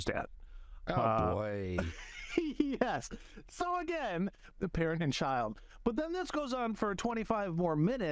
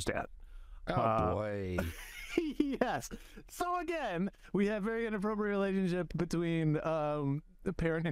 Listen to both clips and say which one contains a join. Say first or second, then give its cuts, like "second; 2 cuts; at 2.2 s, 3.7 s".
first; 1 cut; at 4.5 s